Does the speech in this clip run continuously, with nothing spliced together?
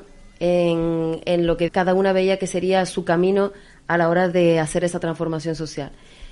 no; 1 cut; at 1.7 s

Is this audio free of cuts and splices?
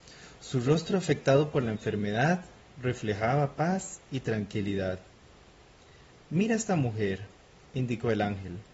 yes; 0 cuts

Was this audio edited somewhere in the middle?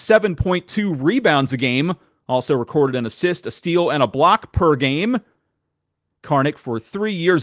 no; 0 cuts

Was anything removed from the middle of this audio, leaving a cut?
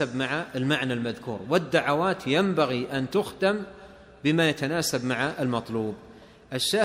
no; 0 cuts

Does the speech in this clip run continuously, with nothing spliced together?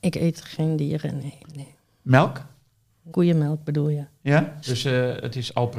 no; 3 cuts; at 1.4 s, 3.1 s, 4.6 s

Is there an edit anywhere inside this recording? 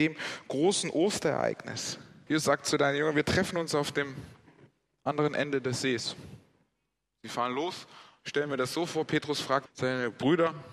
yes; 2 cuts; at 2.3 s, 9.7 s

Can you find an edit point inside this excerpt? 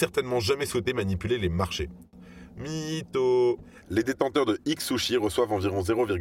yes; 1 cut; at 3.8 s

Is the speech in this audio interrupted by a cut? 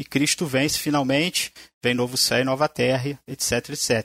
no; 0 cuts

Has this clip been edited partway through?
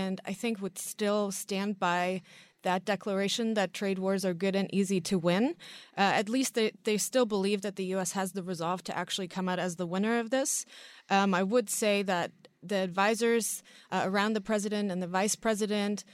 no; 0 cuts

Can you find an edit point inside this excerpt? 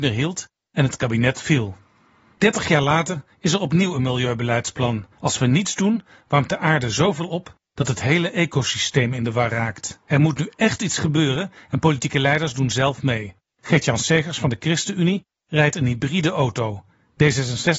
yes; 3 cuts; at 5.1 s, 10.0 s, 13.5 s

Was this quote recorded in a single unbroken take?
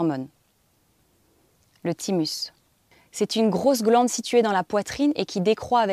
yes; 0 cuts

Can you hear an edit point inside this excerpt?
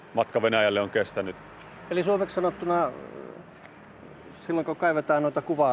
no; 0 cuts

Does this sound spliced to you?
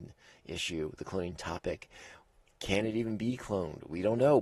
no; 0 cuts

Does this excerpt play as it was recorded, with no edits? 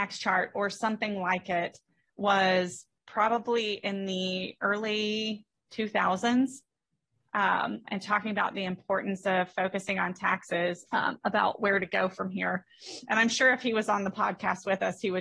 no; 2 cuts; at 7.8 s, 10.9 s

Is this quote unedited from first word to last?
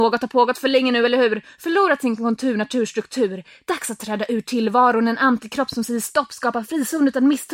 yes; 0 cuts

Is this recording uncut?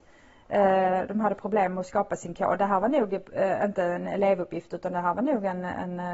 yes; 0 cuts

